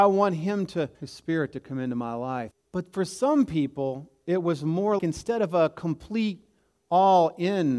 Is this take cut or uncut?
cut